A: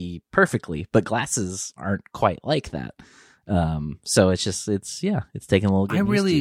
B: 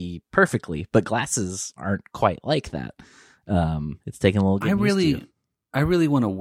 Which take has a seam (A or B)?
B